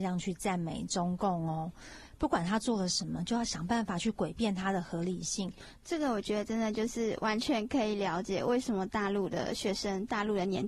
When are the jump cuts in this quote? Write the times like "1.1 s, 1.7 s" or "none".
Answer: none